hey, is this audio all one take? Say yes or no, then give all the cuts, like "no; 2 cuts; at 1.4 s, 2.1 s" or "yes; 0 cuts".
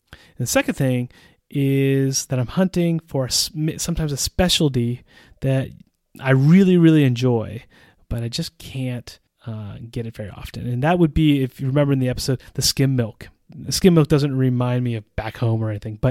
yes; 0 cuts